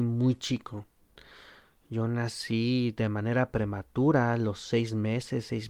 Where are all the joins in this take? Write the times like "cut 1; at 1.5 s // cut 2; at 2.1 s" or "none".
none